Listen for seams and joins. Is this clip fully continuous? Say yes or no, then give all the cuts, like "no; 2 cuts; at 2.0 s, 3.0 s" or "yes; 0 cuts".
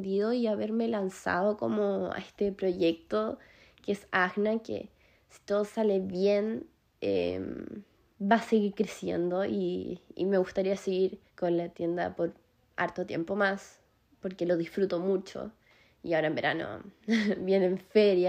no; 1 cut; at 11.3 s